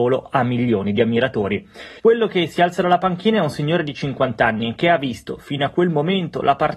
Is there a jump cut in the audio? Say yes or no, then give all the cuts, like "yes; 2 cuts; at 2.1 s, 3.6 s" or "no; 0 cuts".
yes; 1 cut; at 2.0 s